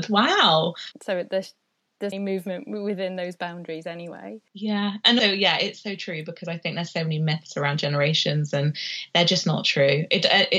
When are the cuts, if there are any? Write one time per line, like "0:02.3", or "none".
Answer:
0:00.9
0:02.1
0:05.2

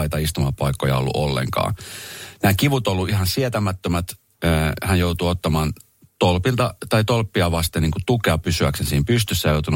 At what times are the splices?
none

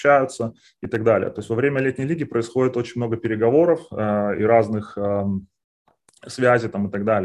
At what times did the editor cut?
none

